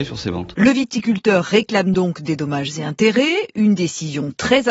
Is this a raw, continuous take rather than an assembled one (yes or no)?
yes